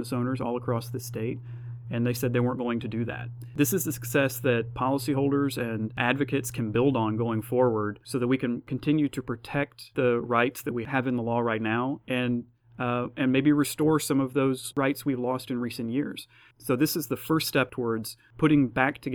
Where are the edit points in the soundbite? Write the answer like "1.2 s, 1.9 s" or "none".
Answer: none